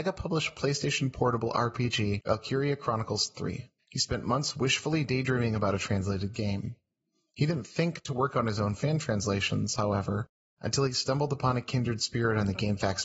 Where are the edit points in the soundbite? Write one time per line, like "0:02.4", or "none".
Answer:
none